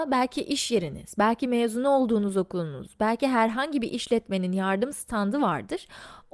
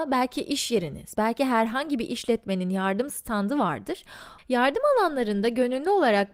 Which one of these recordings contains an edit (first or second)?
second